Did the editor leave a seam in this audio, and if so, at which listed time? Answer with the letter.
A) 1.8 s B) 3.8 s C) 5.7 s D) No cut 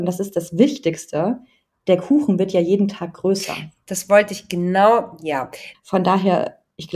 C